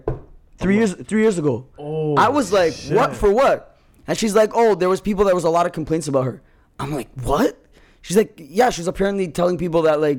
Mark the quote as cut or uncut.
uncut